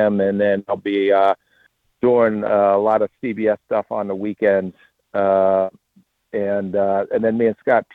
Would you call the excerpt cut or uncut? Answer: uncut